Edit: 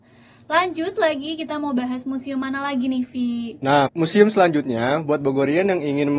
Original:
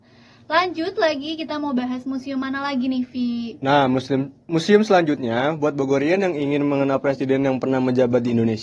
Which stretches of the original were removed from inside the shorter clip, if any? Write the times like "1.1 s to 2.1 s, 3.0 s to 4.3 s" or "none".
3.9 s to 4.4 s